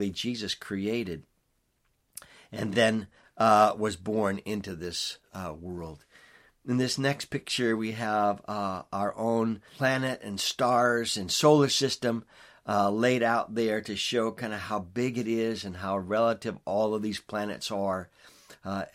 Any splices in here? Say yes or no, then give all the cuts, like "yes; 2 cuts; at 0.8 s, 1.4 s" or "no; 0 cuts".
no; 0 cuts